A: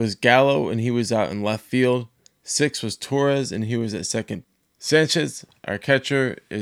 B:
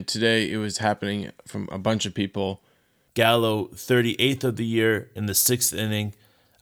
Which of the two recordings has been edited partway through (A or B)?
B